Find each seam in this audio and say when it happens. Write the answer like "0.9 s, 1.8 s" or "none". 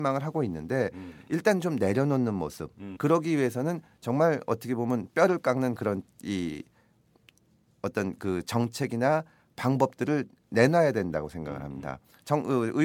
3.0 s